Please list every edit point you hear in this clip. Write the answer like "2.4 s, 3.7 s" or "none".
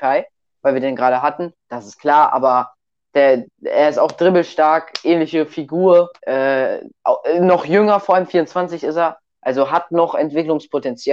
1.7 s, 6.2 s